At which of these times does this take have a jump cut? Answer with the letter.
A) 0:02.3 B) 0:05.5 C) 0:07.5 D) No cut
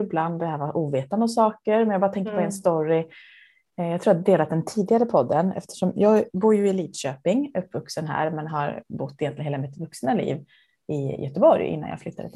B